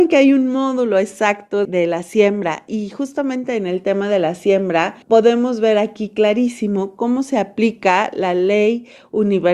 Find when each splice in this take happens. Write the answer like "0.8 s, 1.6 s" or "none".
1.7 s, 5.0 s